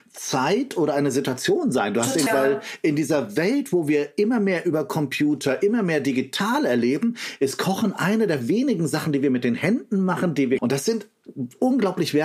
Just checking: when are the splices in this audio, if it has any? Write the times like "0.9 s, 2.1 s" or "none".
2.3 s, 10.6 s